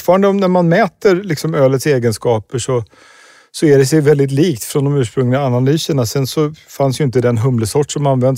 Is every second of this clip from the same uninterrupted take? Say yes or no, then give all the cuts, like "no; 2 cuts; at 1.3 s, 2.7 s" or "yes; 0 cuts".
yes; 0 cuts